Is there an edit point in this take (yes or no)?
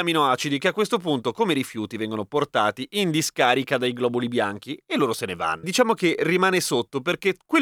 yes